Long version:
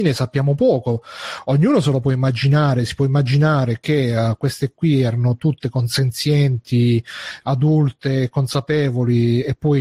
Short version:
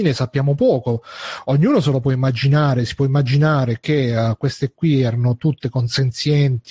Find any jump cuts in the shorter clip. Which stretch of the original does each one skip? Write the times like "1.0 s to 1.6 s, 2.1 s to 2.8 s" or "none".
none

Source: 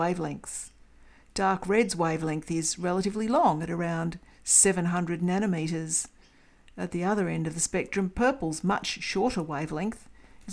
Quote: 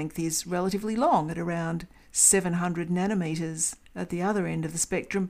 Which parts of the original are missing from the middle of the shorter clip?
6.2 s to 6.7 s

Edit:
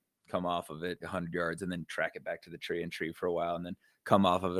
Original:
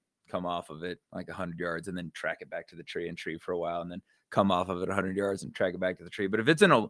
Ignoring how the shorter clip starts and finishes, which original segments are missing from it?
1.0 s to 1.3 s

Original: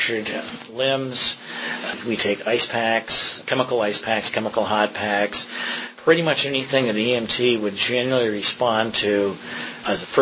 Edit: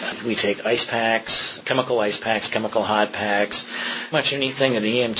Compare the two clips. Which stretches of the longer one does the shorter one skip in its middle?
5.9 s to 6.2 s

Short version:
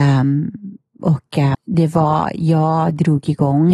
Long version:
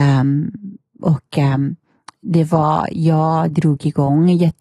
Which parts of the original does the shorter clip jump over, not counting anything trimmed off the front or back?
1.5 s to 2.1 s

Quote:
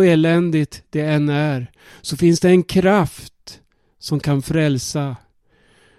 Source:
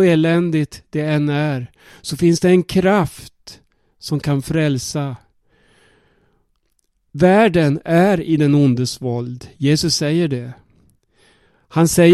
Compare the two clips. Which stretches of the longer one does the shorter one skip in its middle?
none

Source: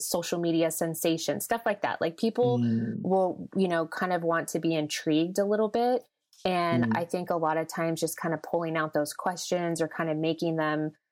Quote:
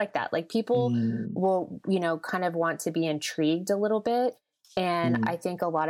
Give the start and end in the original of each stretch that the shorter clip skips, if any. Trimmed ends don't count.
none

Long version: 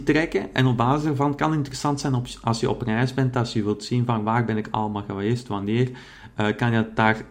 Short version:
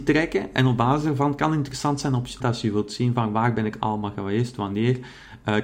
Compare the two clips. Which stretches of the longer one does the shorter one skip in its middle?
2.4 s to 3.3 s

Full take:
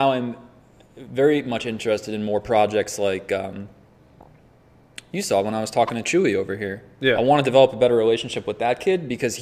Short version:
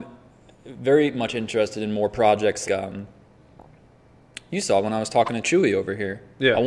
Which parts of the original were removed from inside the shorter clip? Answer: 3.0 s to 3.3 s

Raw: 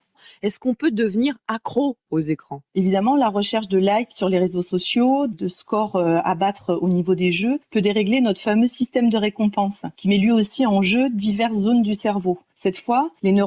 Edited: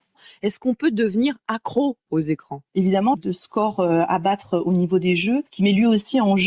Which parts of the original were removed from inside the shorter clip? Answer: 3.1 s to 5.3 s, 7.7 s to 9.9 s

